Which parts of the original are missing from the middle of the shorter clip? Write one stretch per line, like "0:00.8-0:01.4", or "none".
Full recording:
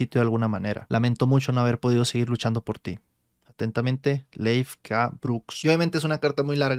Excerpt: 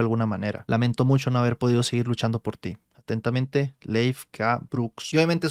0:03.1-0:03.4